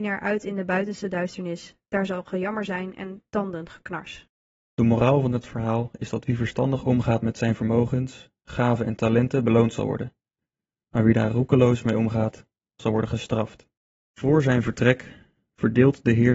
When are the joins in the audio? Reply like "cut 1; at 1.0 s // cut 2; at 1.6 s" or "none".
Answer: none